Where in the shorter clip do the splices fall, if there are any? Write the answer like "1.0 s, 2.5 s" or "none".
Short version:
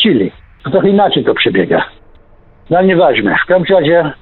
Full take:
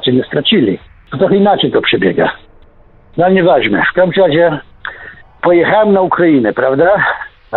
none